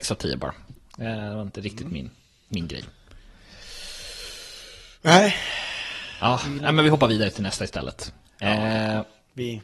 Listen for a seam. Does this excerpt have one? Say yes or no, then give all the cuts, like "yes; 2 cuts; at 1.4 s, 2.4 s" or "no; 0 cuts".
no; 0 cuts